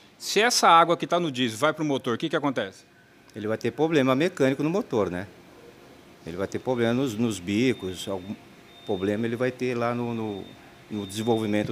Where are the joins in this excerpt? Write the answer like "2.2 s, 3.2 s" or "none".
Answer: none